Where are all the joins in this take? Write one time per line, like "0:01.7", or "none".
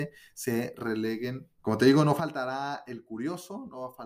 0:01.6

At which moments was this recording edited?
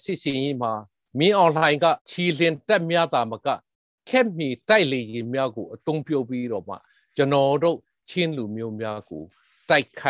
0:02.0

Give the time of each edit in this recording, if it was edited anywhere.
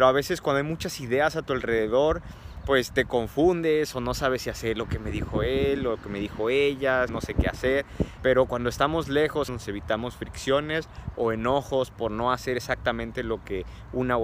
0:07.1
0:08.2
0:09.5

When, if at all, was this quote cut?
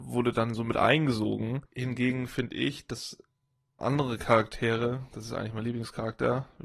0:01.7
0:03.8

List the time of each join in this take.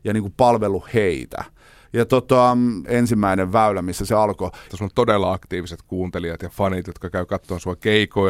0:02.8
0:04.7

